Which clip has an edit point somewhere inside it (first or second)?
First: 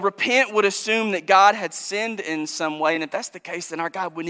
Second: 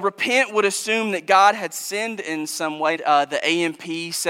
second